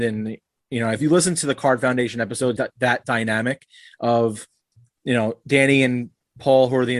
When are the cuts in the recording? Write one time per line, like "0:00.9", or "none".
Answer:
0:02.6

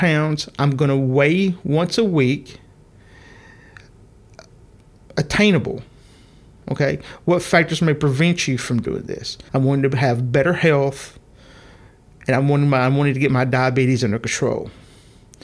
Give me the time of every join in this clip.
0:09.5

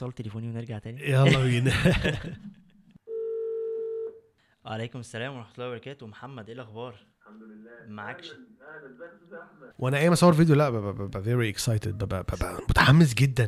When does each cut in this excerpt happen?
0:07.2
0:09.7

